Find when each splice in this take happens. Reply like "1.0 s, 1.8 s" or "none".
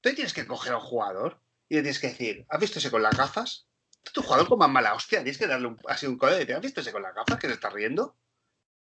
none